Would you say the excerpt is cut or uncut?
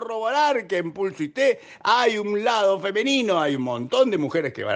uncut